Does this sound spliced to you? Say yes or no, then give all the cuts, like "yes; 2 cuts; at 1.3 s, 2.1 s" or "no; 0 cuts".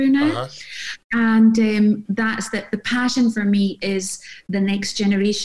yes; 1 cut; at 2.1 s